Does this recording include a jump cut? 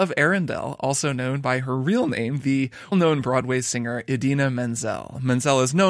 yes; 1 cut; at 2.9 s

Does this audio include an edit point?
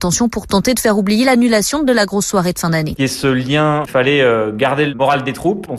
yes; 1 cut; at 3.0 s

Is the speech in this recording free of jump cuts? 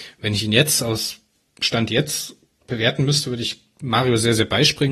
yes; 0 cuts

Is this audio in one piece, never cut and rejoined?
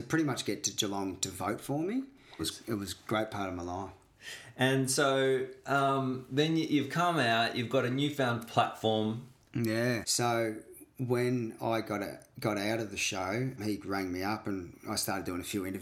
no; 3 cuts; at 2.4 s, 10.0 s, 13.6 s

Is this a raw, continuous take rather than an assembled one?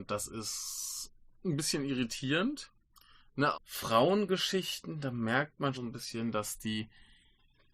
no; 2 cuts; at 3.5 s, 5.7 s

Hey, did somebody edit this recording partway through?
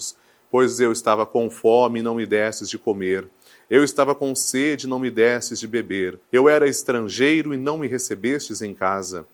yes; 1 cut; at 6.2 s

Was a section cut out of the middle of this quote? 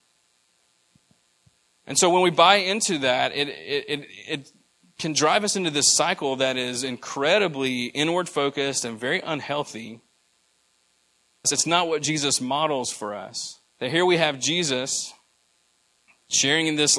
yes; 2 cuts; at 11.4 s, 13.7 s

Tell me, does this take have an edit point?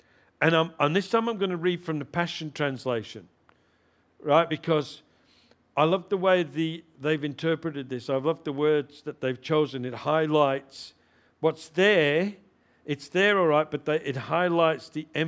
no; 0 cuts

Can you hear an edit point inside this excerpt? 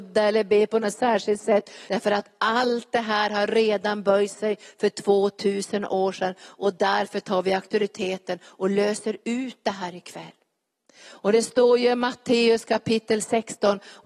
yes; 1 cut; at 1.9 s

